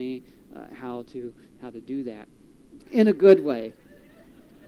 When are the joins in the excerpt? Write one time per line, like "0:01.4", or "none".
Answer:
0:02.8